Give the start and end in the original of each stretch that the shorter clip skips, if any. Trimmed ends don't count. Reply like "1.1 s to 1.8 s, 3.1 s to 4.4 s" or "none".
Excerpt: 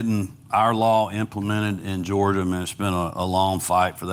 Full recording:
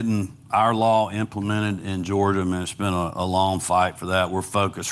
none